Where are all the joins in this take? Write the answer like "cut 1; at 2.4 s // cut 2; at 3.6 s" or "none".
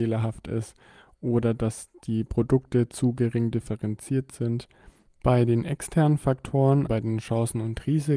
cut 1; at 5.1 s // cut 2; at 6.9 s

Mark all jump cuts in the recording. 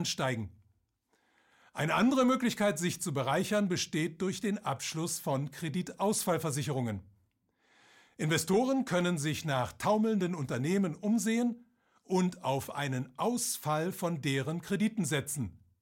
none

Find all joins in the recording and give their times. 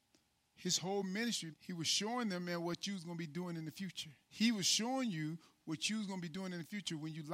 cut 1; at 1.5 s // cut 2; at 4.2 s

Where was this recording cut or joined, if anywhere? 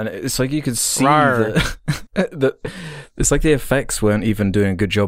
cut 1; at 2.1 s

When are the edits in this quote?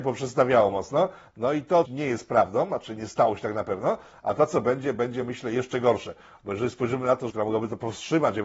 cut 1; at 1.9 s // cut 2; at 7.3 s

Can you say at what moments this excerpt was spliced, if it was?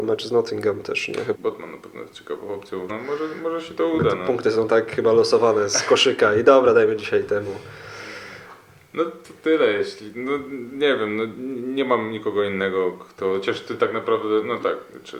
cut 1; at 1.3 s // cut 2; at 2.9 s

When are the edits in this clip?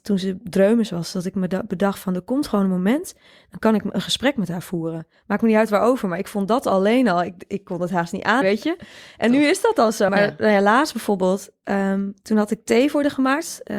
cut 1; at 8.4 s // cut 2; at 10.1 s

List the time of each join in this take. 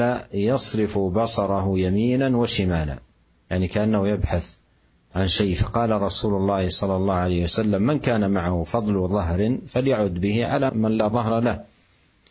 cut 1; at 10.7 s

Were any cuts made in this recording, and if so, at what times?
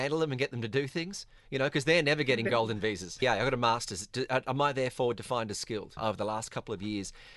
cut 1; at 3.2 s // cut 2; at 6.0 s

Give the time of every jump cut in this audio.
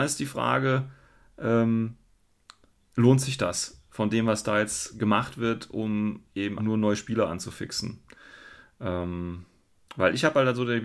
cut 1; at 6.6 s

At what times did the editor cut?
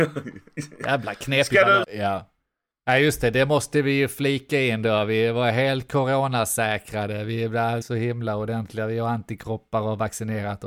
cut 1; at 1.8 s // cut 2; at 7.8 s

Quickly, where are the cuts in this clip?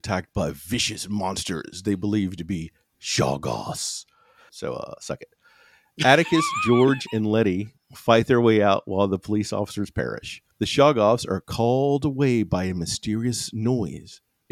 cut 1; at 4.5 s // cut 2; at 10.5 s

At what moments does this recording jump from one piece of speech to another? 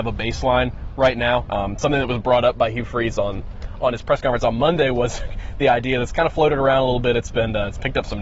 cut 1; at 1.5 s

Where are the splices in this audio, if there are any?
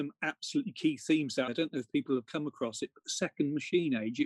cut 1; at 1.5 s

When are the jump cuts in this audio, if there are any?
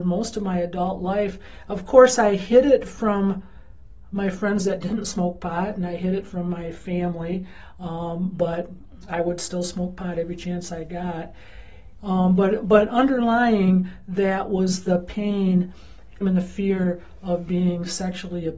cut 1; at 12.0 s // cut 2; at 16.2 s

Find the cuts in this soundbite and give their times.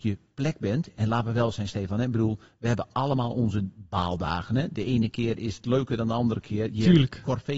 none

